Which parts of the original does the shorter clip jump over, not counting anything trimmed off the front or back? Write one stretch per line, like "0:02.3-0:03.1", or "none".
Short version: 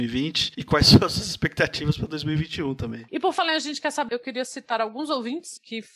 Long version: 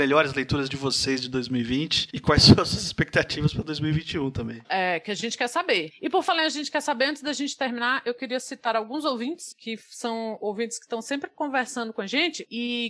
0:04.6-0:06.0
0:07.0-0:08.0